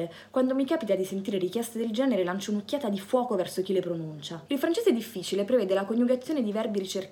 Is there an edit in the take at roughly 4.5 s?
yes; 1 cut; at 4.5 s

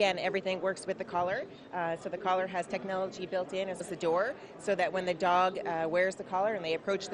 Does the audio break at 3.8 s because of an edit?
yes; 1 cut; at 3.8 s

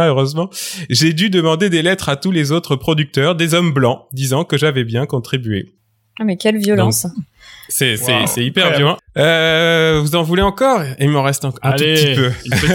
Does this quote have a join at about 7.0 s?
no; 1 cut; at 9.0 s

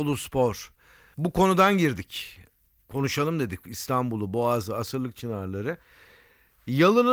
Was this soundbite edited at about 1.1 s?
yes; 1 cut; at 1.1 s

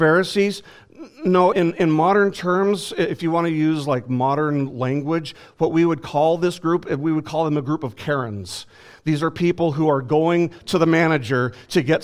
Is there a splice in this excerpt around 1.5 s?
yes; 1 cut; at 1.5 s

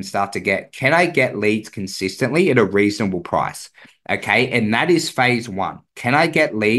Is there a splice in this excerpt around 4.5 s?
no; 0 cuts

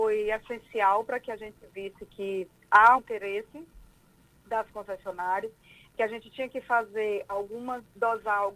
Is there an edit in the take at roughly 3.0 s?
yes; 1 cut; at 3.0 s

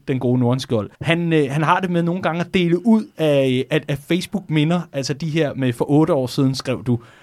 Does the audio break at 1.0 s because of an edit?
yes; 1 cut; at 1.0 s

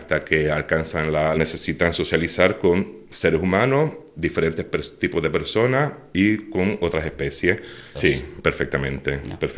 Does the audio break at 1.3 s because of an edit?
yes; 2 cuts; at 1.3 s, 7.9 s

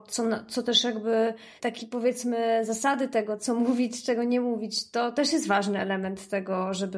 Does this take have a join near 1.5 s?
yes; 1 cut; at 1.5 s

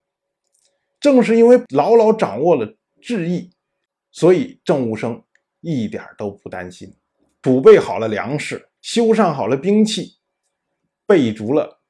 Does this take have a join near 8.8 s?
yes; 2 cuts; at 7.4 s, 8.8 s

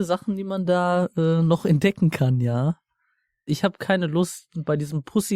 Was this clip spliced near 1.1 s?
no; 1 cut; at 3.5 s

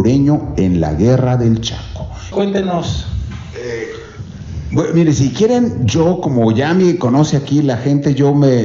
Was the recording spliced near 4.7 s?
no; 1 cut; at 2.3 s

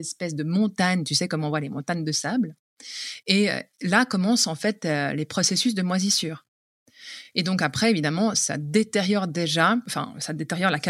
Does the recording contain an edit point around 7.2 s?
no; 0 cuts

